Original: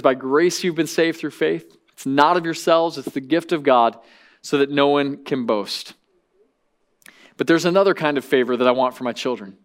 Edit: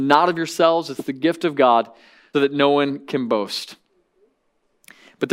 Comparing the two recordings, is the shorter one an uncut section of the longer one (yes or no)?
no